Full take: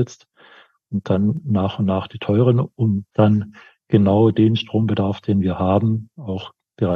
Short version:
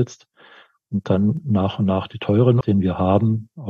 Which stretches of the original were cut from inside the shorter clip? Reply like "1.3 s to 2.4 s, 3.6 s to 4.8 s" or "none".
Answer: 2.6 s to 5.2 s